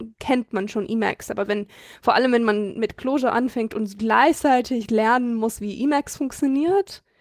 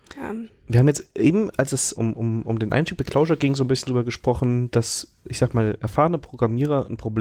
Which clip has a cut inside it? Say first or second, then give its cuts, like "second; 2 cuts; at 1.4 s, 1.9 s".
second; 1 cut; at 1.9 s